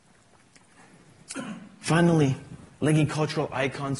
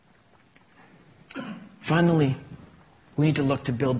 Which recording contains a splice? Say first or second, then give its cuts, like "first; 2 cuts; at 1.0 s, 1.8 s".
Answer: first; 1 cut; at 2.7 s